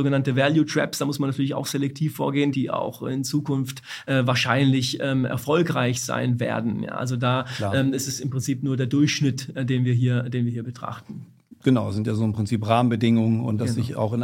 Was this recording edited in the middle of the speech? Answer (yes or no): yes